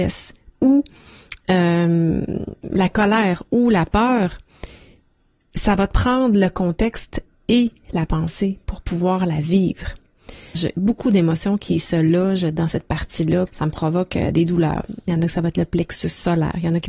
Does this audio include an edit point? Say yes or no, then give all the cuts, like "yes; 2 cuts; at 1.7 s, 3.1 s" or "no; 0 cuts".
yes; 2 cuts; at 10.5 s, 13.5 s